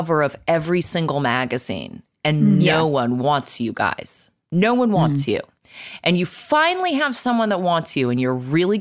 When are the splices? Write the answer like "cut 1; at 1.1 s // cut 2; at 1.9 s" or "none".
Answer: none